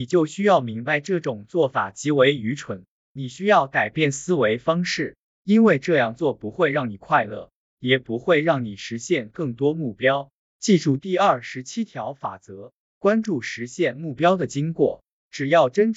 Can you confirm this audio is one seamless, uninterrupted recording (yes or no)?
yes